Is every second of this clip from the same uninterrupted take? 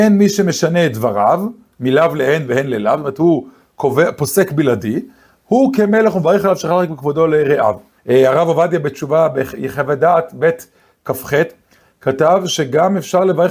no; 1 cut; at 8.0 s

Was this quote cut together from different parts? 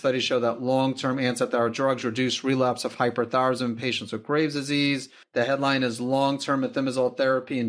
yes; 1 cut; at 5.2 s

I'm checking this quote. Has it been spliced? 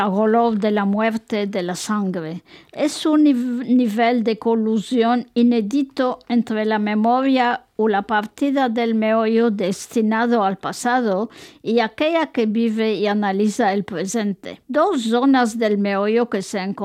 yes; 1 cut; at 14.6 s

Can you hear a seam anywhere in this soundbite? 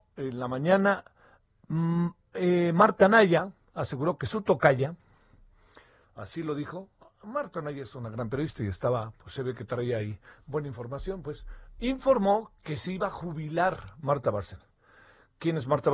no; 0 cuts

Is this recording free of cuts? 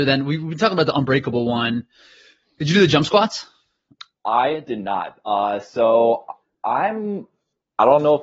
yes; 0 cuts

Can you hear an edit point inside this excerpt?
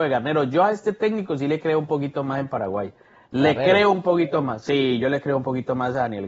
no; 0 cuts

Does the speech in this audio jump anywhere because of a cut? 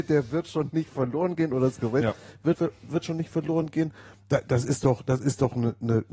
yes; 1 cut; at 2.5 s

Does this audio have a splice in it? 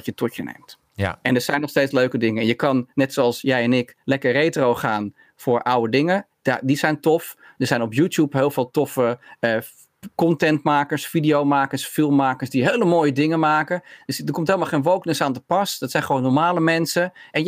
no; 0 cuts

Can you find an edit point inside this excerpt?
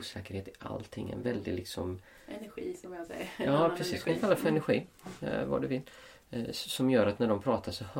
no; 0 cuts

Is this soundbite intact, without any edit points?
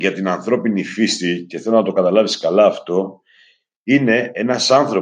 yes; 0 cuts

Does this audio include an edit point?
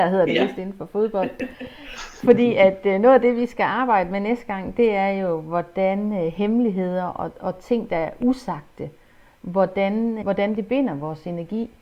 yes; 1 cut; at 10.2 s

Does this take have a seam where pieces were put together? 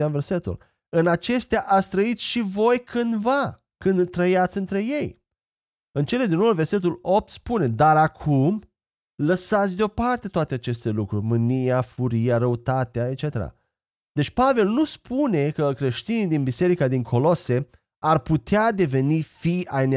no; 0 cuts

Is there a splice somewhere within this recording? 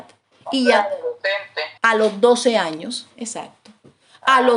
yes; 1 cut; at 1.8 s

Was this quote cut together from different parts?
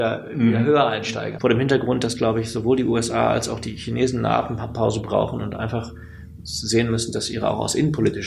yes; 1 cut; at 1.4 s

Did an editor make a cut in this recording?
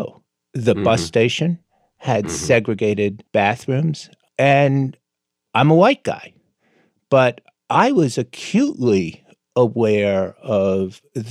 no; 0 cuts

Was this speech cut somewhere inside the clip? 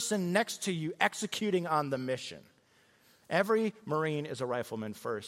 no; 0 cuts

